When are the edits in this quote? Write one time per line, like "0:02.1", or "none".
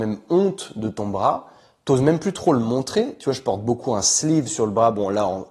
none